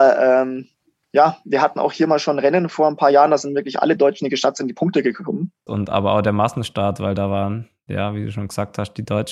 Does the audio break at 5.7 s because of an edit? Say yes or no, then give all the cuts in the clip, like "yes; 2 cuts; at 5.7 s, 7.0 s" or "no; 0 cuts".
yes; 1 cut; at 5.7 s